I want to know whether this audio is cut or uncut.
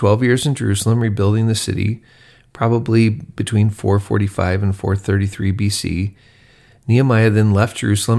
uncut